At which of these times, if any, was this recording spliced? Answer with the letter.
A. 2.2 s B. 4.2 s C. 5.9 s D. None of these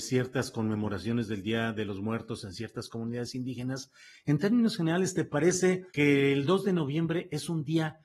C